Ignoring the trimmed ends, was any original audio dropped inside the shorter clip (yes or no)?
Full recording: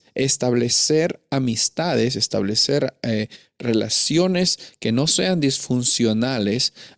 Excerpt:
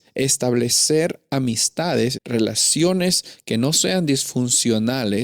yes